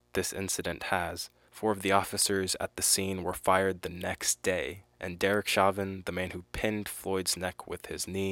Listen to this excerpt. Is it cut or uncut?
cut